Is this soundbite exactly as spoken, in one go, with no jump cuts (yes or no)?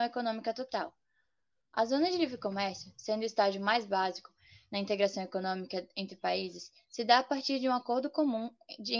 yes